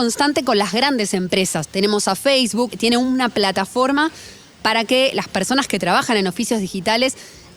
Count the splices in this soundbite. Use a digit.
2